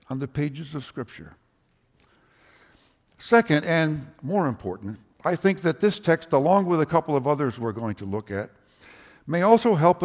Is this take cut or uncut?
uncut